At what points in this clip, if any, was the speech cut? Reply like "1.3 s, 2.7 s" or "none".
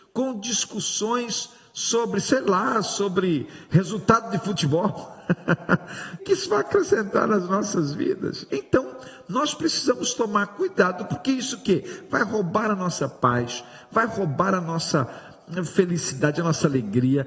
6.2 s, 8.5 s